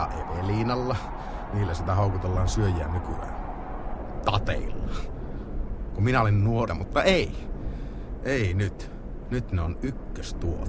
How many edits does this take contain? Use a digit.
1